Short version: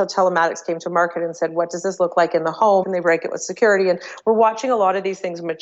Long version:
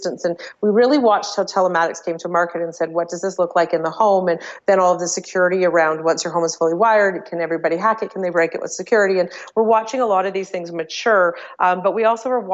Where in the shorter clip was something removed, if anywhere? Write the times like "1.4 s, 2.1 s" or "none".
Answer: 2.8 s